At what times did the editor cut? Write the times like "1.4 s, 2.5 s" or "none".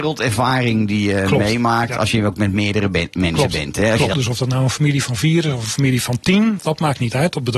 4.1 s, 6.6 s